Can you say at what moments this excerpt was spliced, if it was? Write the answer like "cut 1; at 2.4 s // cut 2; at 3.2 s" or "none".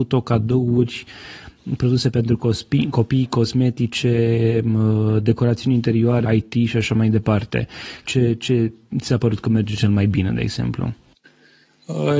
cut 1; at 6.2 s // cut 2; at 8.1 s